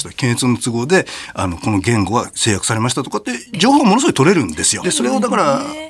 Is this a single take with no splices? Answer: no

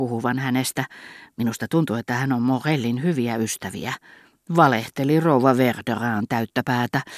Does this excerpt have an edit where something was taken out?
no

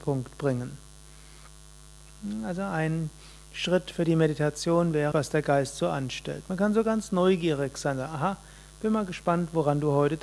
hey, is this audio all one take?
no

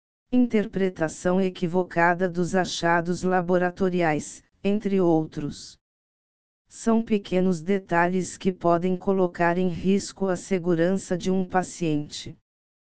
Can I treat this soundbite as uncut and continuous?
yes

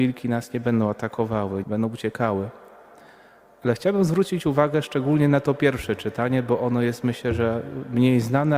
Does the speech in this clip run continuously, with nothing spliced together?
no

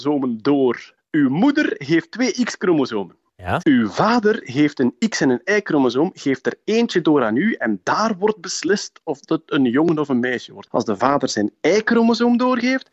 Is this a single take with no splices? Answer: no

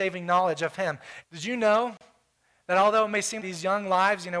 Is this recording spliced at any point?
yes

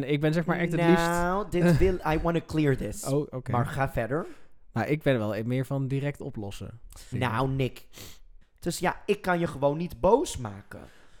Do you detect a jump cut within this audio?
yes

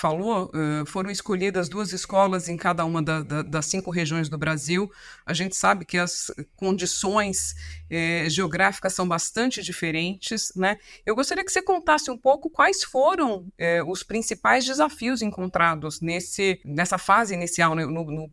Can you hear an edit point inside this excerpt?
no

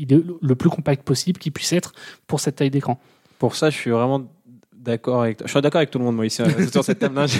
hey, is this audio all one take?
yes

